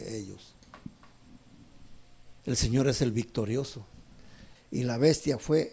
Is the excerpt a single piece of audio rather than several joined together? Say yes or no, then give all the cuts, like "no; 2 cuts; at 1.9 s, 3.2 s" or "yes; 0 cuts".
no; 2 cuts; at 2.4 s, 4.6 s